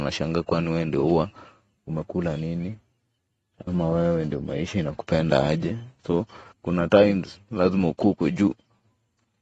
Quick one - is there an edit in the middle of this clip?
yes; 1 cut; at 6.5 s

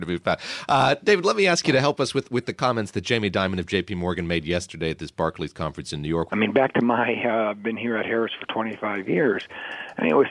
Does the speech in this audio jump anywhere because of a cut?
yes; 1 cut; at 6.3 s

